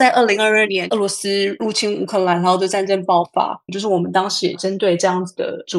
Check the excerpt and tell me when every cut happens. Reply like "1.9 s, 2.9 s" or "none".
3.7 s

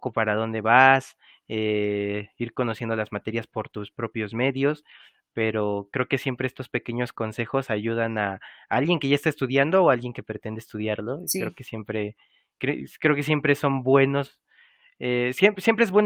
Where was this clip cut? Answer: none

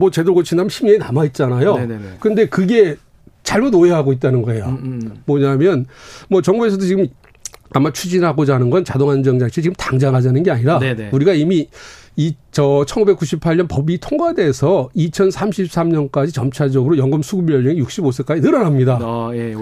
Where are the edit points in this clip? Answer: 2.2 s

